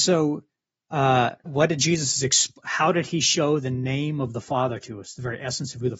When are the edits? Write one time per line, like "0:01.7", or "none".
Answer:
0:01.5